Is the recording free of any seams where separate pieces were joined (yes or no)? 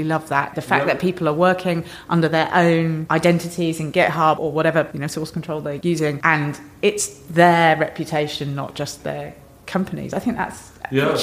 yes